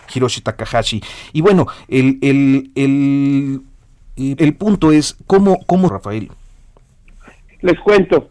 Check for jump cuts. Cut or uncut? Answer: cut